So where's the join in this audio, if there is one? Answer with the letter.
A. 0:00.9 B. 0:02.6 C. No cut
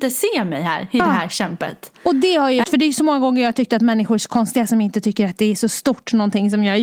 B